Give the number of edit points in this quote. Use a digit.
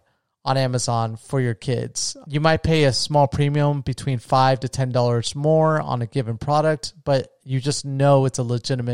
1